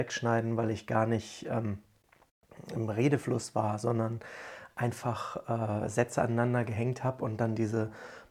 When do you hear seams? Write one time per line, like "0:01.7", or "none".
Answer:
none